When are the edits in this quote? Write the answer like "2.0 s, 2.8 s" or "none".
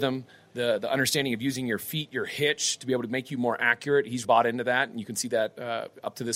4.2 s